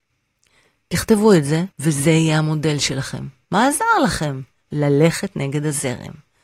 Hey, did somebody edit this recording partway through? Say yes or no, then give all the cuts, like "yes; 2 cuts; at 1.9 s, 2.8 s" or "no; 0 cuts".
yes; 2 cuts; at 1.7 s, 3.4 s